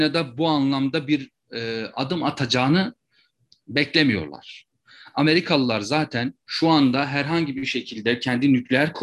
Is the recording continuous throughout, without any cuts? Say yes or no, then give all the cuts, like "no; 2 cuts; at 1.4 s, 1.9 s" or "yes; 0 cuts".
no; 1 cut; at 6.4 s